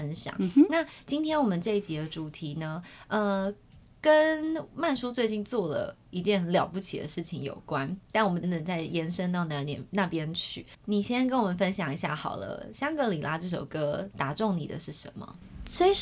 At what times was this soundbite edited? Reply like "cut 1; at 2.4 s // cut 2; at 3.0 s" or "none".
cut 1; at 8.4 s // cut 2; at 10.7 s